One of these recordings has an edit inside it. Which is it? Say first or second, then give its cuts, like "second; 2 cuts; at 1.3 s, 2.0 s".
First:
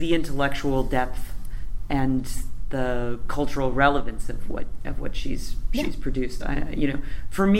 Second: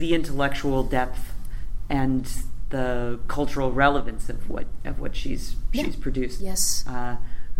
second; 1 cut; at 6.4 s